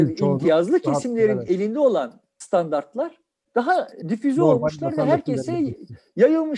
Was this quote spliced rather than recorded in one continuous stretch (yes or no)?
no